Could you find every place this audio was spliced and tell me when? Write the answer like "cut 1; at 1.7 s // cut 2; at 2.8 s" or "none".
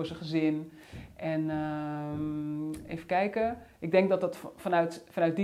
none